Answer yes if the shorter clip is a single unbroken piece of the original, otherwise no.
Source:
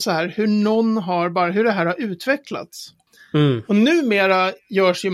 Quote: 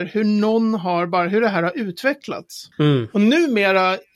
no